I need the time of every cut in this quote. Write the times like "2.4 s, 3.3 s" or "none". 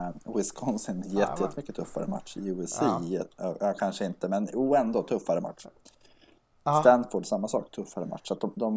none